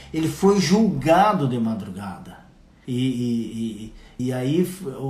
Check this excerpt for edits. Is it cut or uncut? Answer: cut